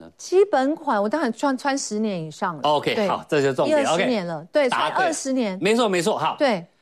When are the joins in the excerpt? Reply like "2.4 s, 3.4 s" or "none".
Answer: none